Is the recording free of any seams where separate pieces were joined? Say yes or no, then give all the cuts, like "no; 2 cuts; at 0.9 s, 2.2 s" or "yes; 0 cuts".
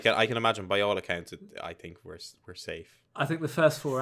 yes; 0 cuts